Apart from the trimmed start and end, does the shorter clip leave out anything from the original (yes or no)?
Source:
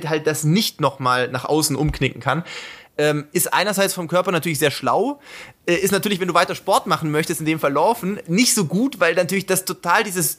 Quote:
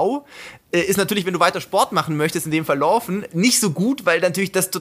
no